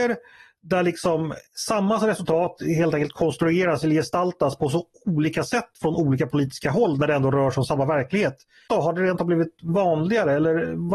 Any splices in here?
yes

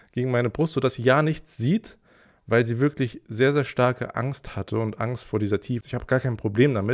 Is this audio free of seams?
no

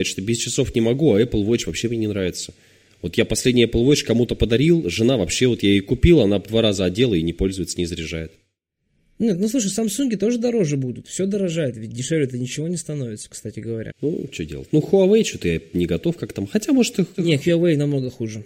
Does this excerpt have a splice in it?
no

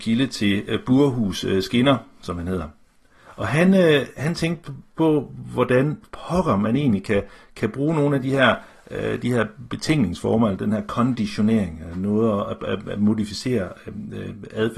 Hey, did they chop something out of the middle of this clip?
no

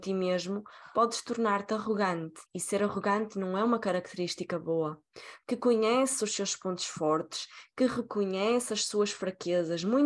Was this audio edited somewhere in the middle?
yes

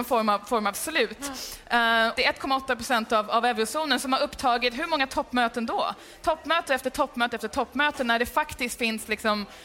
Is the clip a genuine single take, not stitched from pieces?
no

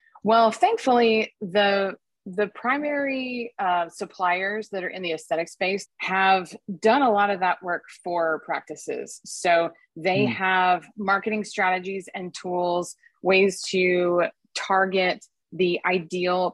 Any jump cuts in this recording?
yes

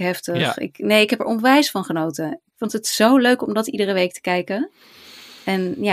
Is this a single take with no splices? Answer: yes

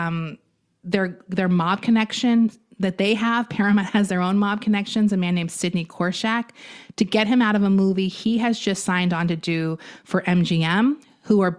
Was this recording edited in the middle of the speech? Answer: no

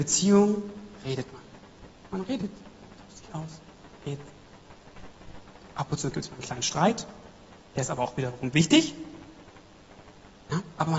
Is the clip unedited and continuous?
no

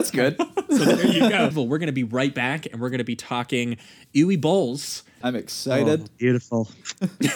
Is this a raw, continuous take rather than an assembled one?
no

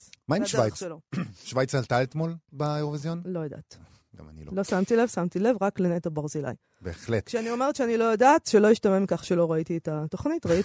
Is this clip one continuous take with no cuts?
yes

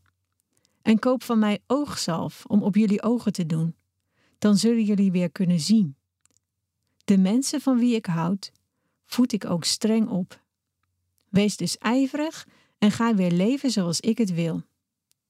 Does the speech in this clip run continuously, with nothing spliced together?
yes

